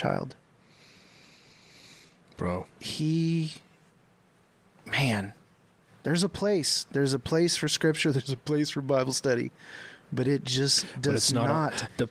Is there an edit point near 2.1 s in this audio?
no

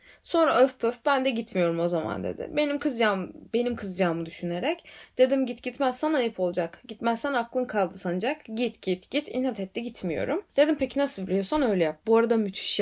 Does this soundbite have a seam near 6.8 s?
no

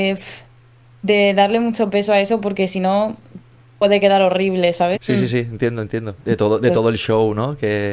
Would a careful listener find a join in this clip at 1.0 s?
no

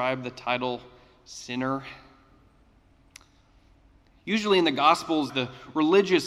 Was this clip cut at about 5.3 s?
yes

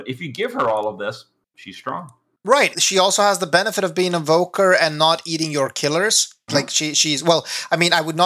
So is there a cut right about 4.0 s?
no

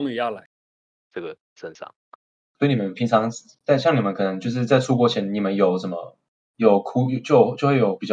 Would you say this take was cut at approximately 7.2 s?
no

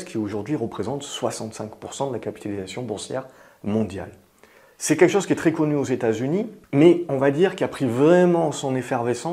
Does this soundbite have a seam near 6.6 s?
yes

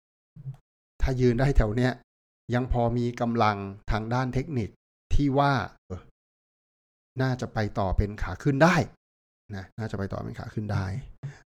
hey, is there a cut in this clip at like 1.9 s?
no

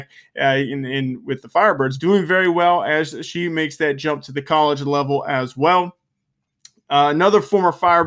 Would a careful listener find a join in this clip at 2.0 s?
yes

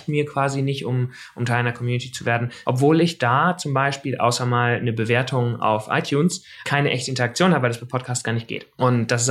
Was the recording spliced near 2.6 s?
yes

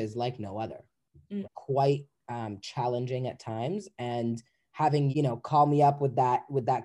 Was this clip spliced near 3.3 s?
no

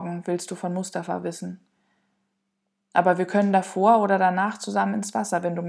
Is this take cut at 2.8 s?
yes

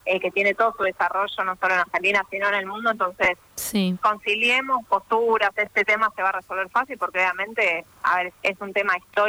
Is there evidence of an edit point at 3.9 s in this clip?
yes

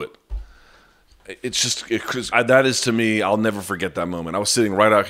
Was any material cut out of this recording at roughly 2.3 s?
yes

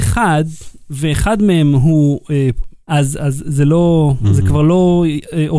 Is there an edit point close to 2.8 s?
yes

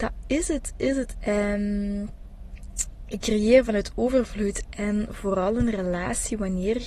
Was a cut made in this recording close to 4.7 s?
yes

